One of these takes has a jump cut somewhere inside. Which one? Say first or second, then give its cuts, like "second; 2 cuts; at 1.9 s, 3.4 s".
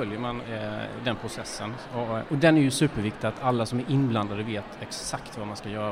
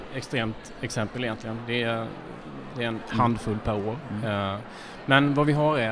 second; 1 cut; at 2.7 s